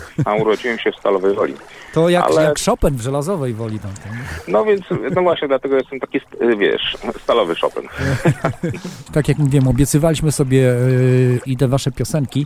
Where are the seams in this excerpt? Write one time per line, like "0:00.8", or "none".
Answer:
0:09.1
0:11.5

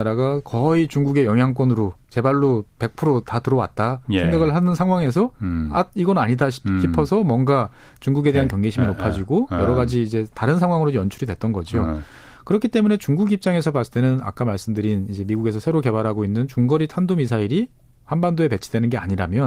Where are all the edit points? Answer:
none

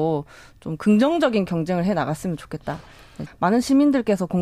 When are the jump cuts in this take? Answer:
0:03.3

